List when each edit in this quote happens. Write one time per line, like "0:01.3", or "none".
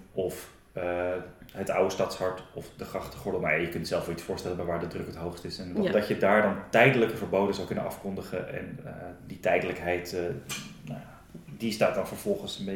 0:05.9